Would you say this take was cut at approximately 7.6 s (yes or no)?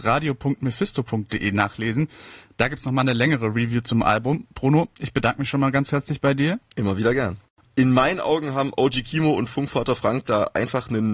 yes